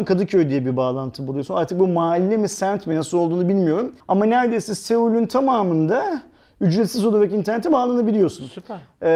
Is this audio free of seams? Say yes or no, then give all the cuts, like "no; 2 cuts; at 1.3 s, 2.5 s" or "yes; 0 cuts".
no; 1 cut; at 4.0 s